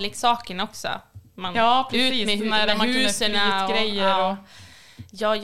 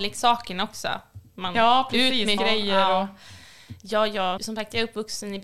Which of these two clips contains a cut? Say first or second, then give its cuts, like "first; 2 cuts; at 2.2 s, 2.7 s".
second; 2 cuts; at 2.4 s, 4.4 s